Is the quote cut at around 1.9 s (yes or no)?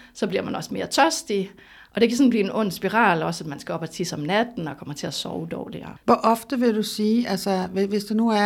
no